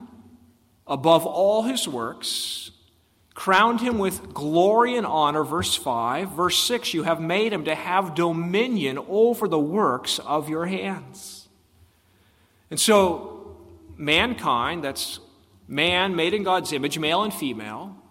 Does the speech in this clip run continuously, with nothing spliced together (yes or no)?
yes